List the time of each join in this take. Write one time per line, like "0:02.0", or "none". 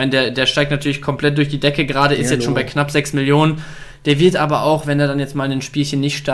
none